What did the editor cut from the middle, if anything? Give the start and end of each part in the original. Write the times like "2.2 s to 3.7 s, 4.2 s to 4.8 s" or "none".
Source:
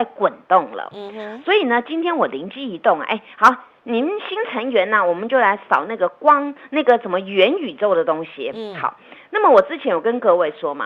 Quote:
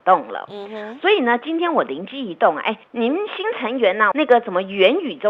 3.3 s to 3.8 s, 5.0 s to 6.7 s